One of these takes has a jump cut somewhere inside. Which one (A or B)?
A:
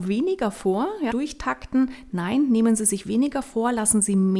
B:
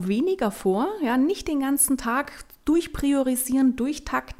A